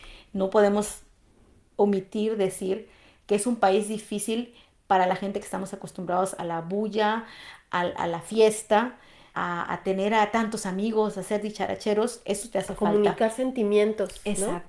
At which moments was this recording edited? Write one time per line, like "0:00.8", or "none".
none